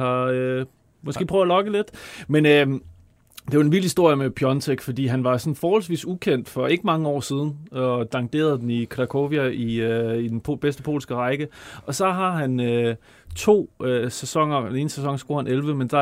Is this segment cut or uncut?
uncut